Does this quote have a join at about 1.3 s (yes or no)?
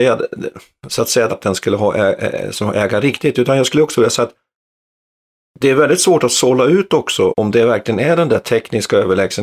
yes